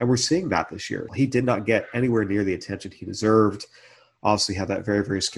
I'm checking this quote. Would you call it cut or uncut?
cut